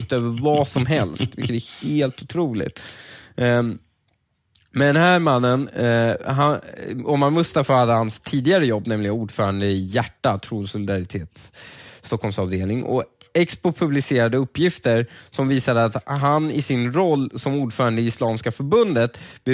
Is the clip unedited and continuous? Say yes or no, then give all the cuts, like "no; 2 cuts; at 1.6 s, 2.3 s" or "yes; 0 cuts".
yes; 0 cuts